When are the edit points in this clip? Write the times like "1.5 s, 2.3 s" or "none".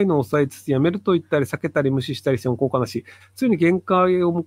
3.2 s